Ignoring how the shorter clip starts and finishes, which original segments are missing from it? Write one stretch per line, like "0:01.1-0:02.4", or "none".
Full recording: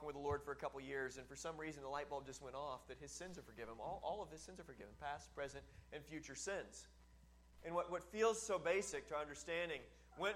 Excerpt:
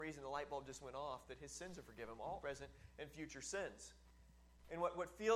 0:04.0-0:05.3

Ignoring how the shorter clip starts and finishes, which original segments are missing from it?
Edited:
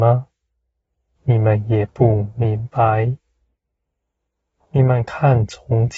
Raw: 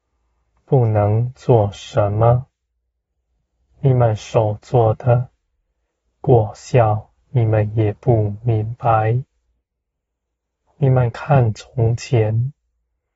0:03.3-0:07.2

